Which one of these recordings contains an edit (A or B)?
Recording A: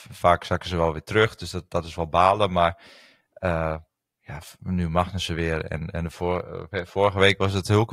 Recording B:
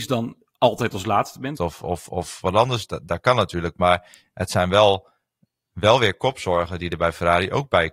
B